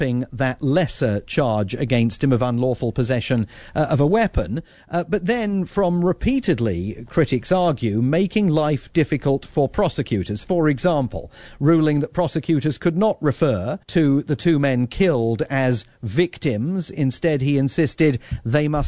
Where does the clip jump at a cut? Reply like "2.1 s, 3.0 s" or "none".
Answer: 13.8 s